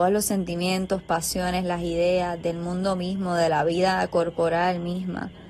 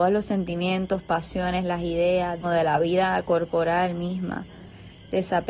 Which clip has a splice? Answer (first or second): second